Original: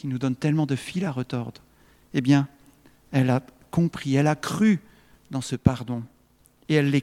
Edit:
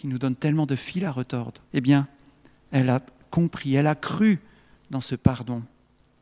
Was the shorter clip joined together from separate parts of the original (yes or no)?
yes